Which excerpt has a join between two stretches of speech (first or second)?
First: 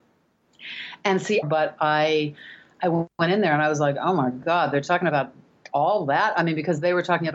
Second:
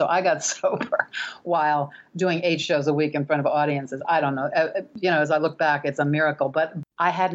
first